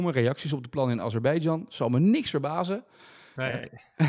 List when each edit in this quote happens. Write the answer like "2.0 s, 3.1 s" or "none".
none